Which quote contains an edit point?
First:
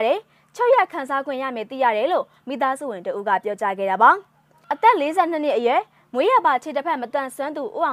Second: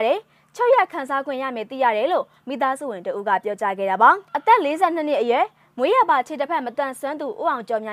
second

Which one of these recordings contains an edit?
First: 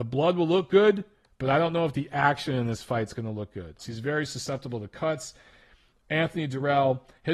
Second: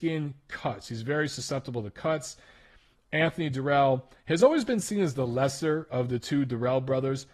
first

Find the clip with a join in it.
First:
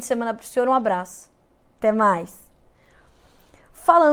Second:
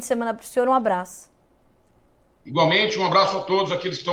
first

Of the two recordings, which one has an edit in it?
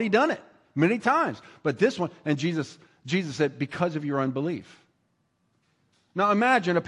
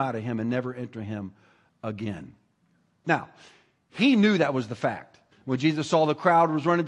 second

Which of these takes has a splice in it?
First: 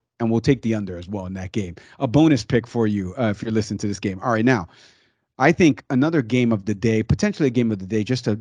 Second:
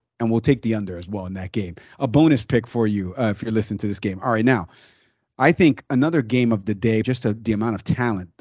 second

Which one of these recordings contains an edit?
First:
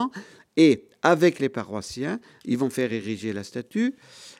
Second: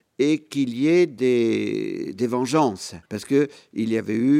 second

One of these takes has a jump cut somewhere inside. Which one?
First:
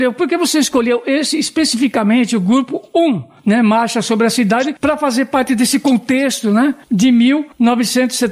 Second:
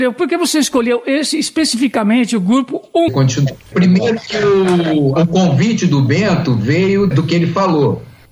second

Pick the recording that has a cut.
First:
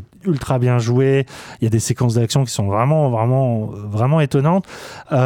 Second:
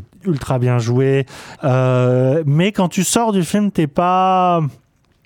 second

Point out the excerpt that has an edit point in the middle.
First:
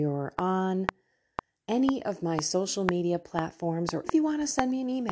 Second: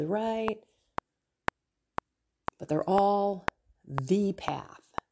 first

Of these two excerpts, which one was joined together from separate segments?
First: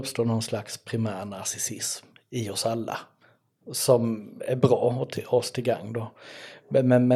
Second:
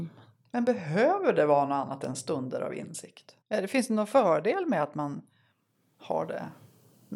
second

